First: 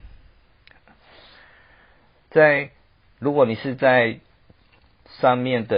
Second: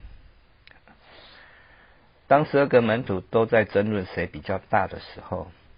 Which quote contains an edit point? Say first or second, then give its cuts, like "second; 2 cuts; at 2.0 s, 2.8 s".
second; 1 cut; at 2.2 s